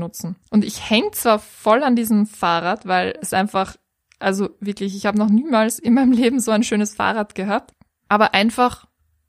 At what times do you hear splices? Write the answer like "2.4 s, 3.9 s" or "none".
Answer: none